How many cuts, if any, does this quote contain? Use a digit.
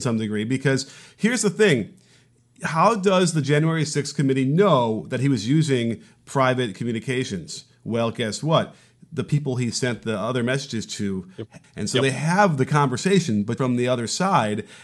2